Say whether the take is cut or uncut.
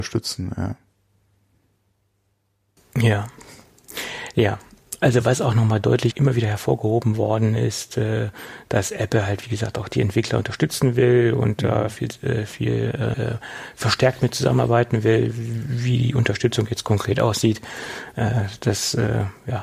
cut